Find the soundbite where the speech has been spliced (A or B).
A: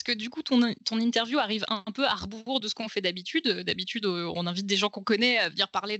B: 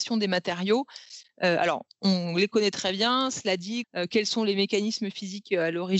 B